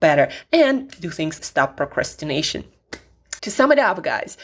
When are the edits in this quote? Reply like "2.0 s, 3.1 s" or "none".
1.4 s, 3.4 s